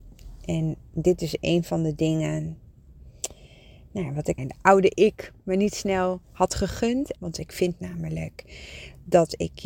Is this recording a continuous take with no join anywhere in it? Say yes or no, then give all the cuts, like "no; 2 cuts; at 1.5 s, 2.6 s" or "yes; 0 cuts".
no; 2 cuts; at 4.4 s, 7.2 s